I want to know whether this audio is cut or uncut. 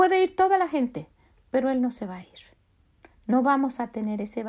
uncut